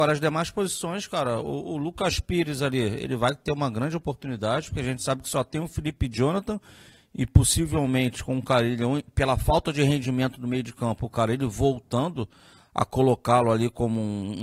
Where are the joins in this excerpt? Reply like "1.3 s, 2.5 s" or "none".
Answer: none